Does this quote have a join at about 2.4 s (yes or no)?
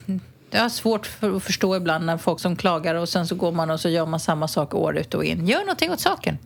yes